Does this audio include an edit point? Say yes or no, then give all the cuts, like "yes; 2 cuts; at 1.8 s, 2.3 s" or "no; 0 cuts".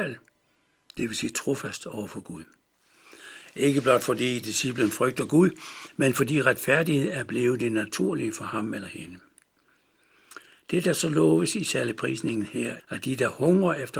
yes; 1 cut; at 12.8 s